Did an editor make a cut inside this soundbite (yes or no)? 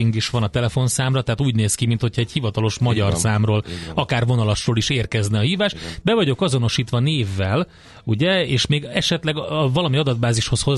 yes